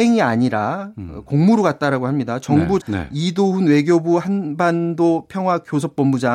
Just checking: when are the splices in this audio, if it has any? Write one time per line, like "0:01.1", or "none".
0:02.8